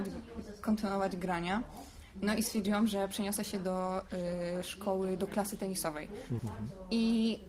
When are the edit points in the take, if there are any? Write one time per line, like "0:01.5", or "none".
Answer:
0:06.4